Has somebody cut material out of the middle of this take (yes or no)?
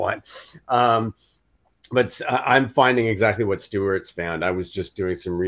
no